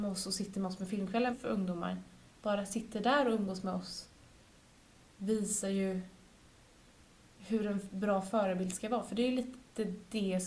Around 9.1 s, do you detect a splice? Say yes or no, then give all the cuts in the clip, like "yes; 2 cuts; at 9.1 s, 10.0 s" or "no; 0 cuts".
no; 1 cut; at 1.3 s